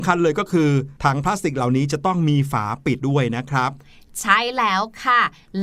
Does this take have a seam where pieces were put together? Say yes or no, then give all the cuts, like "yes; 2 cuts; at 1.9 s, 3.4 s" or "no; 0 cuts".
yes; 2 cuts; at 1.0 s, 3.0 s